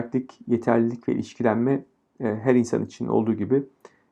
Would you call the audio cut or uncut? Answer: uncut